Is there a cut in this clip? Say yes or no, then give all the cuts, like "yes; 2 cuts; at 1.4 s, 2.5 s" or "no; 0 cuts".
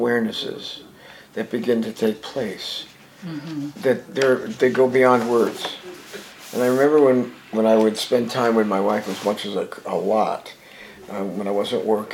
no; 0 cuts